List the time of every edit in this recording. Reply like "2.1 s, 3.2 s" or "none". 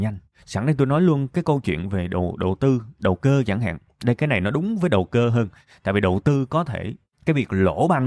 none